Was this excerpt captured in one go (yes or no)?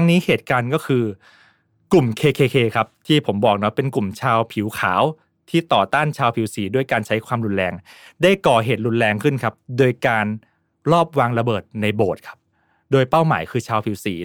yes